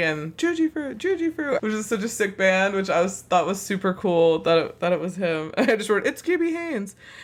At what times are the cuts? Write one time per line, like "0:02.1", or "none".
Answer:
0:01.6